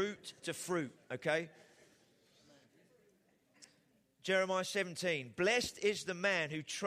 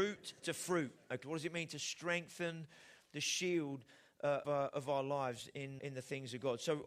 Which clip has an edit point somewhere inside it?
second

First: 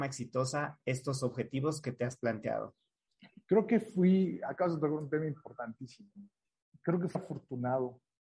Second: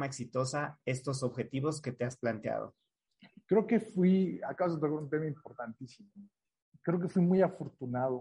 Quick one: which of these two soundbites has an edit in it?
first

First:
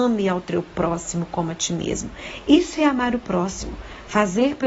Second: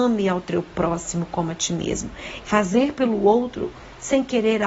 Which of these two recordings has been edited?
second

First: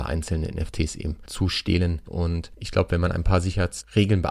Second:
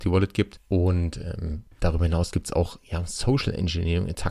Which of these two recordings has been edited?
first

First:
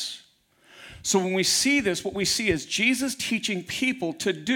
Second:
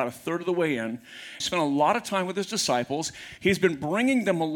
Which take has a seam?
second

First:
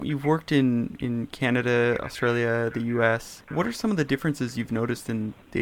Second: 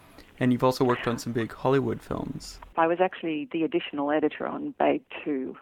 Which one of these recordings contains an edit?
second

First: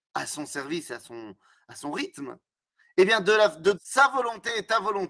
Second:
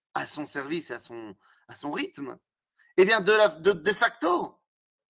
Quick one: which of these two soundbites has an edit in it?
first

